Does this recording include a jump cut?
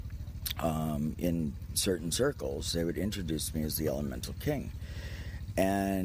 no; 0 cuts

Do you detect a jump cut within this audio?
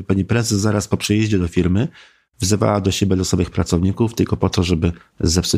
no; 0 cuts

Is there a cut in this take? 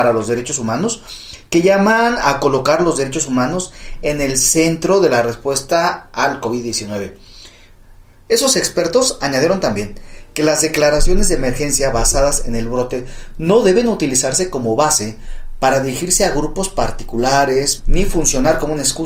yes; 2 cuts; at 8.3 s, 17.8 s

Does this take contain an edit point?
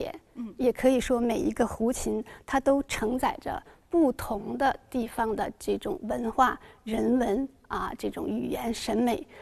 no; 0 cuts

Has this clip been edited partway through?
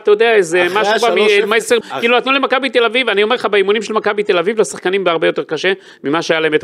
yes; 1 cut; at 1.8 s

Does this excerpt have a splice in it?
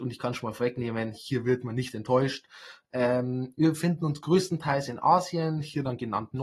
no; 0 cuts

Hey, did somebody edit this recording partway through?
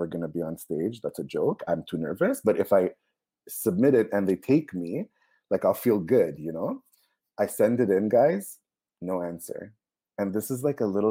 yes; 1 cut; at 1.6 s

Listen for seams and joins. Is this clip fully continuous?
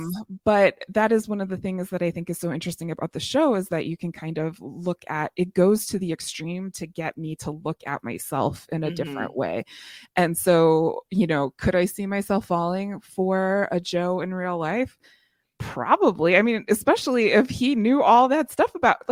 yes; 0 cuts

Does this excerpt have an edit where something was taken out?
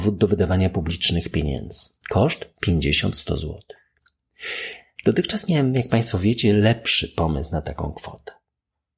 no; 0 cuts

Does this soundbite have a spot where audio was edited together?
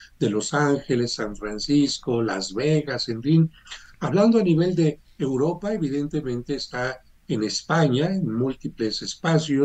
no; 0 cuts

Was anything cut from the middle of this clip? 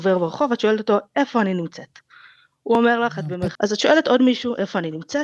yes; 1 cut; at 3.6 s

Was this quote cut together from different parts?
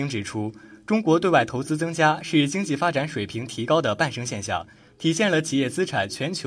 no; 0 cuts

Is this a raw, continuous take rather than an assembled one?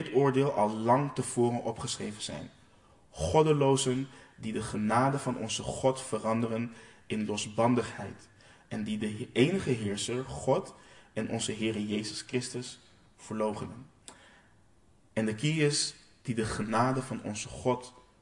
yes; 0 cuts

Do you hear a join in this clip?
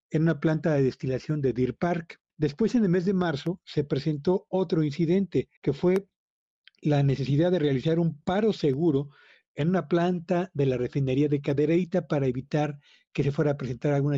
yes; 2 cuts; at 2.3 s, 5.6 s

